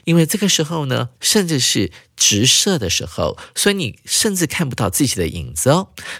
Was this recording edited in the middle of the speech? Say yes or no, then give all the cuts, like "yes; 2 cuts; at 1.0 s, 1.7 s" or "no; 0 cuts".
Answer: yes; 1 cut; at 1.2 s